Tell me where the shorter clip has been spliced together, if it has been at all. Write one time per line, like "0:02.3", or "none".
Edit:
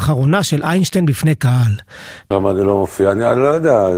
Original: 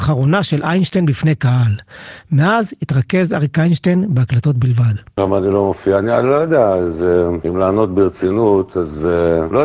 0:02.2

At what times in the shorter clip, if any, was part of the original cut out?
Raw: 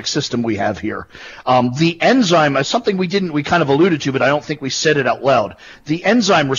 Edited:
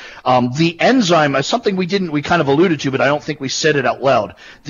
none

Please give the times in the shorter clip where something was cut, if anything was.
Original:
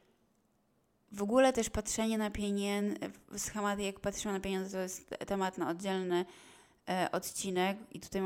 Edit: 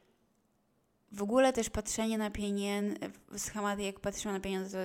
none

